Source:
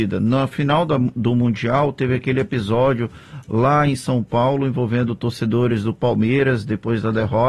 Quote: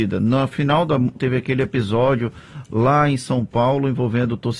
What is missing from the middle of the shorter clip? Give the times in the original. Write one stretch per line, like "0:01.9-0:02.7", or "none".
0:01.1-0:01.9